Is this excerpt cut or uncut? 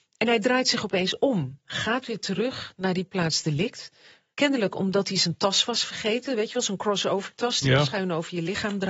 uncut